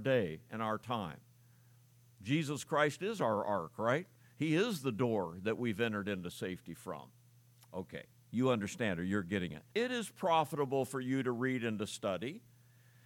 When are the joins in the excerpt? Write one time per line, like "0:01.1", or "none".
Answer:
0:09.7